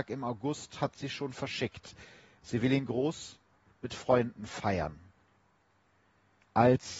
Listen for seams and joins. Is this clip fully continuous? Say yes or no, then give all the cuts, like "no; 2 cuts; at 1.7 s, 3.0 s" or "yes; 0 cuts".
yes; 0 cuts